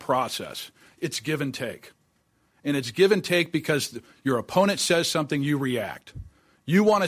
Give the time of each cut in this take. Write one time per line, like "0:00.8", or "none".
0:00.9